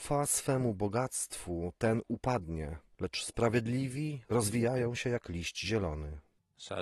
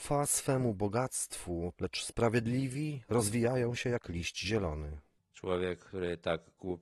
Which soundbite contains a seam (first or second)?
second